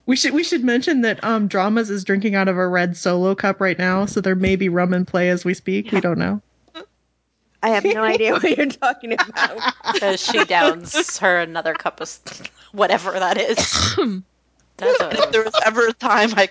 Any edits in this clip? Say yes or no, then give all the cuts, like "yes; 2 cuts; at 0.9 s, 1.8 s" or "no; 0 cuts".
yes; 1 cut; at 14.6 s